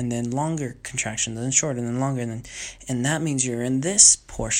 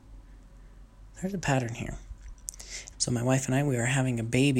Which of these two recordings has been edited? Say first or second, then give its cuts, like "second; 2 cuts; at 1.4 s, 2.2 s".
second; 1 cut; at 2.9 s